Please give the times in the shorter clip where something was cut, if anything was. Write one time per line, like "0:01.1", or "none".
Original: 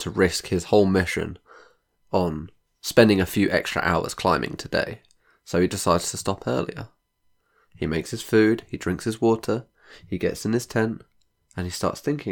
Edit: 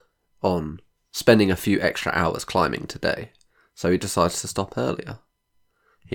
none